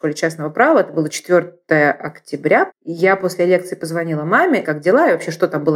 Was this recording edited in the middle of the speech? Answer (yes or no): yes